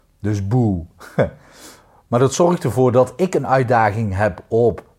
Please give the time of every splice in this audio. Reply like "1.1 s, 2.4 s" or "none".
none